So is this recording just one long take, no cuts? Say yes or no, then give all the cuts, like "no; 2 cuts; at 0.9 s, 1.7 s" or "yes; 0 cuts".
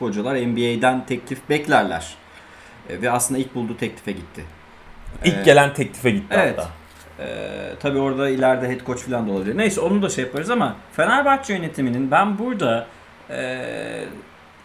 yes; 0 cuts